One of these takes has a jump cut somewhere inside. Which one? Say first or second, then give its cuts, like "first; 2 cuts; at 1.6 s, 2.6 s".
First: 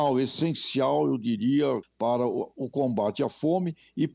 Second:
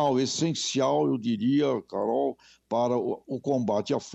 first; 1 cut; at 1.8 s